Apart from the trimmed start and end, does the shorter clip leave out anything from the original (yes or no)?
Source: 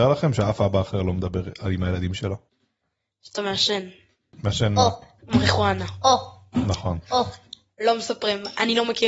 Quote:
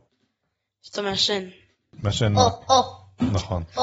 yes